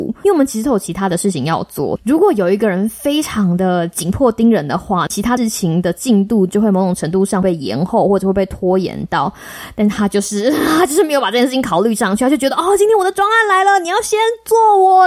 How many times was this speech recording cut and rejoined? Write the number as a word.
zero